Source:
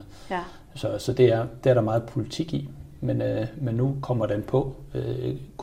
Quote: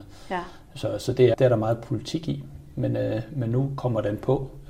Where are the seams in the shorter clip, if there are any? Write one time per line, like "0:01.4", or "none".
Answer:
0:01.3